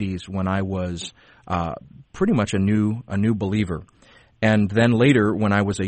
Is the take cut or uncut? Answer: uncut